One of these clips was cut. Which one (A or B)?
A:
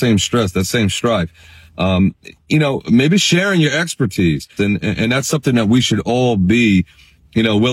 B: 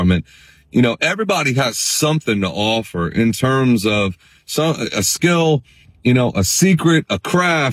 A